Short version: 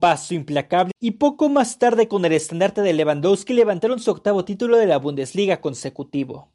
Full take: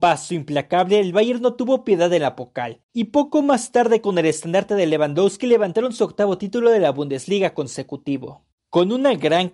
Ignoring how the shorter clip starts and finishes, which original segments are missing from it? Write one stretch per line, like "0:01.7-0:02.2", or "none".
0:00.9-0:02.8

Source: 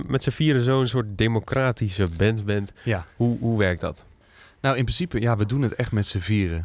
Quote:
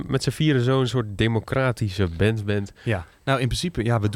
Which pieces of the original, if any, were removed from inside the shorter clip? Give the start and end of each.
0:03.1-0:04.5

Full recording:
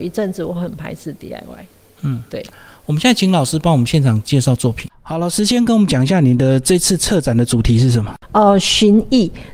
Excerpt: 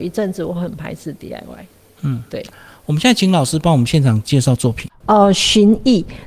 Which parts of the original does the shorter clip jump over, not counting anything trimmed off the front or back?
0:05.0-0:08.3

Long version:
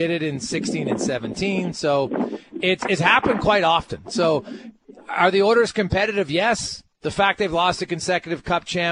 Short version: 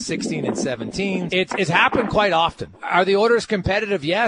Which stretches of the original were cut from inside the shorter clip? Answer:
0:01.7-0:02.6
0:04.0-0:05.0

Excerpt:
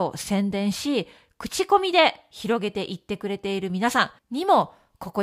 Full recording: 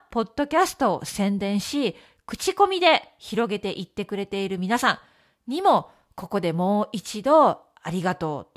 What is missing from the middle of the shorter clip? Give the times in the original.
0:05.1-0:05.4

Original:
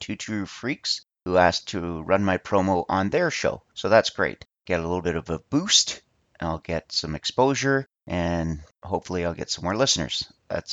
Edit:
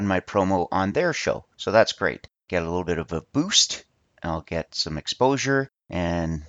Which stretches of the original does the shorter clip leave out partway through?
none

